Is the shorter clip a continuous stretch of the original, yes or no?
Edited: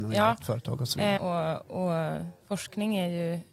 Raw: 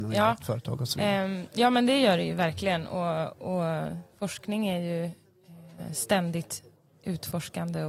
no